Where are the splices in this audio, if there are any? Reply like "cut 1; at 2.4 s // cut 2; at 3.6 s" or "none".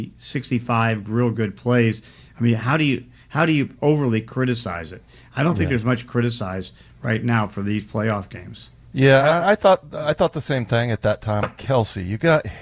cut 1; at 11.4 s